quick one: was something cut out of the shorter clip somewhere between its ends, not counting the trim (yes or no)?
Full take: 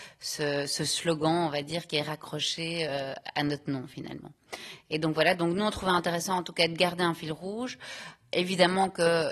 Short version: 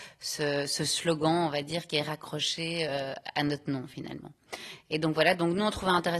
no